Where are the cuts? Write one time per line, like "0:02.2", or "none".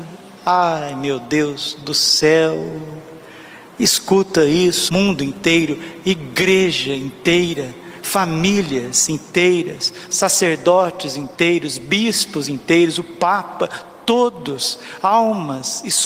0:04.9